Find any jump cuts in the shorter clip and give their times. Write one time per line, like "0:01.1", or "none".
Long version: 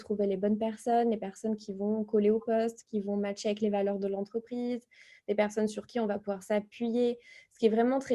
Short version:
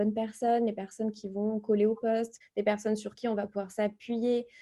0:02.4